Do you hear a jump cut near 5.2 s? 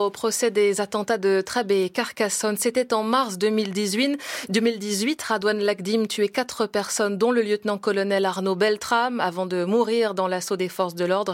no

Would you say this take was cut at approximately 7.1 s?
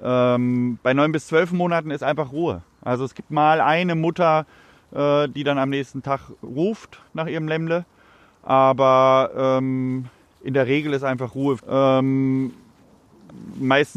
yes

